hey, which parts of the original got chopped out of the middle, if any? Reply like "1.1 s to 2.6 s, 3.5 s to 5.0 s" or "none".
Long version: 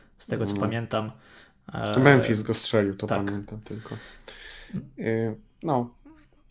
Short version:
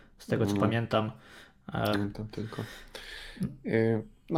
1.9 s to 3.2 s